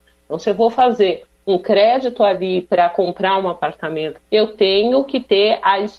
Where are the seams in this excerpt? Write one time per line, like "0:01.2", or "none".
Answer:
0:04.3